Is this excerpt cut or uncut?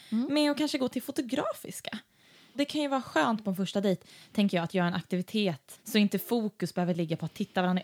uncut